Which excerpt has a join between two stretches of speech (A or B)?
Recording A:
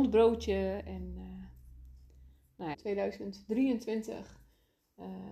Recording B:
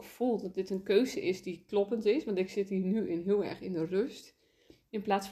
A